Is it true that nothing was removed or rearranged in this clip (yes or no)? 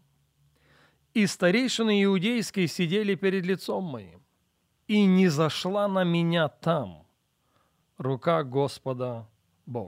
yes